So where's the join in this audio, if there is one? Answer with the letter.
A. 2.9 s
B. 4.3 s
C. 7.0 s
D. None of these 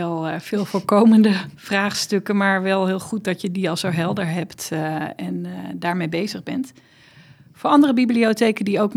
D